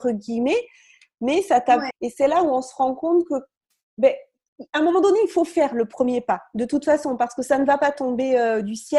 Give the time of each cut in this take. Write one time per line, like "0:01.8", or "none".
0:01.9